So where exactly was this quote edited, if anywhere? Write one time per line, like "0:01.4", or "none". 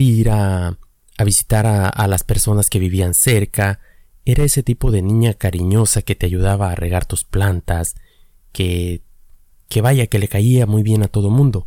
none